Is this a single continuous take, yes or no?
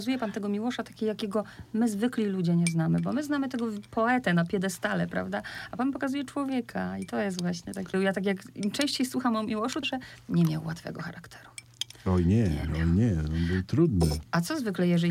no